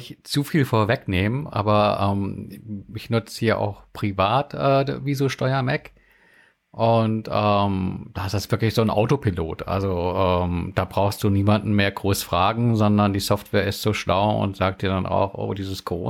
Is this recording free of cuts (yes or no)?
yes